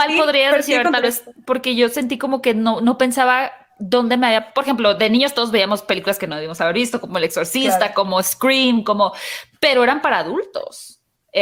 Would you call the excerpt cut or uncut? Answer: uncut